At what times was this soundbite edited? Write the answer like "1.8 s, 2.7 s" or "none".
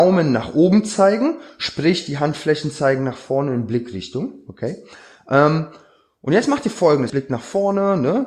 7.1 s